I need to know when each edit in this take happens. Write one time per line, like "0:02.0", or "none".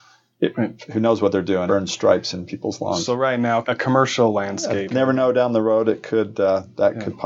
0:01.7
0:03.6
0:04.9